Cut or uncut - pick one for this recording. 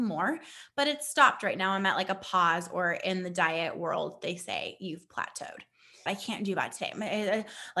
cut